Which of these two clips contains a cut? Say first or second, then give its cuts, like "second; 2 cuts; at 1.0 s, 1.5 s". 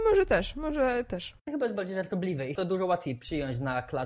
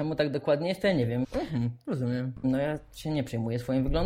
second; 2 cuts; at 1.2 s, 2.4 s